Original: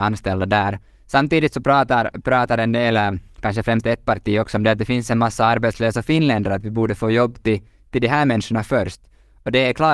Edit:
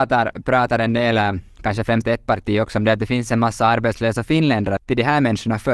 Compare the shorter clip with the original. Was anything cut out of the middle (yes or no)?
yes